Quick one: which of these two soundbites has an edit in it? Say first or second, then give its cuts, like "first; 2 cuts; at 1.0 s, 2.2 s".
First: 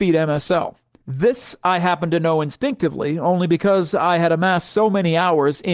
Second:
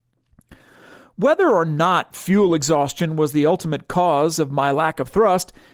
first; 1 cut; at 1.0 s